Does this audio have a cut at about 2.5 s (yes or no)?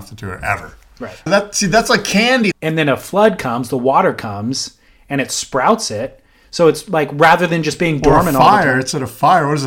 yes